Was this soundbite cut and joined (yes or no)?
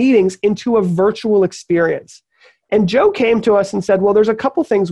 no